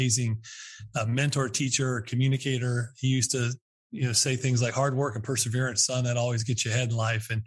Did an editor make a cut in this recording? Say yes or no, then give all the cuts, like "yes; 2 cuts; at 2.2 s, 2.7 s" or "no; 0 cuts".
no; 0 cuts